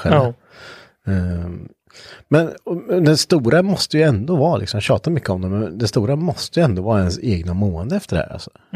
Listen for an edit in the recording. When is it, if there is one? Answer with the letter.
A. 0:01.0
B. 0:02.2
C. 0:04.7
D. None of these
D